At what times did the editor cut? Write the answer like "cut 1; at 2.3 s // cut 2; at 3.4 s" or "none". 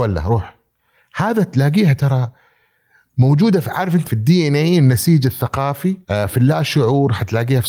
cut 1; at 4.0 s // cut 2; at 6.0 s